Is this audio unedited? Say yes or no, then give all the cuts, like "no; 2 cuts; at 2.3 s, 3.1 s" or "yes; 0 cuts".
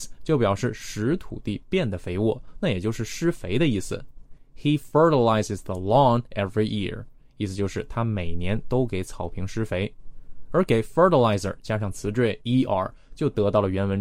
yes; 0 cuts